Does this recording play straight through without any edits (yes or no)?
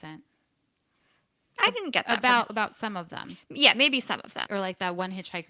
no